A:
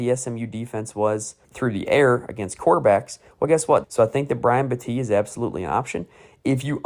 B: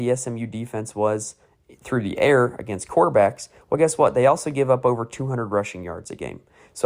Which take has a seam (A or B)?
A